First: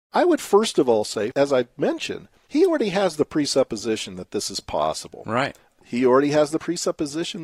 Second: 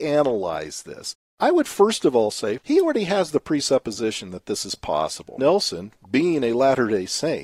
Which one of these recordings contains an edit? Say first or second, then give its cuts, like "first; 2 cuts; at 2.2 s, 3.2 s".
second; 2 cuts; at 2.6 s, 5.4 s